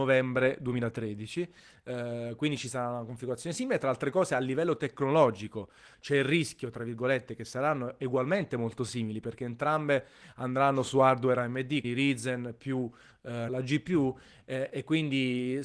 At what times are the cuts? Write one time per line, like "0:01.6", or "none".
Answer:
0:11.8
0:13.5